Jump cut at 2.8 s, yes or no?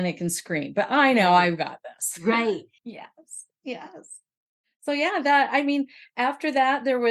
yes